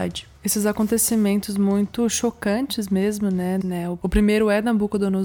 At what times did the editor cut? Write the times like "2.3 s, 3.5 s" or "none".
3.6 s